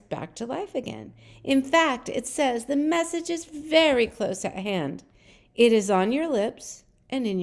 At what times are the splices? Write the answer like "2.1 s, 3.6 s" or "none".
none